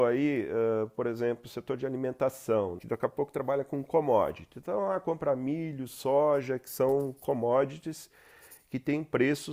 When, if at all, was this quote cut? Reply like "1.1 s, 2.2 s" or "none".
2.8 s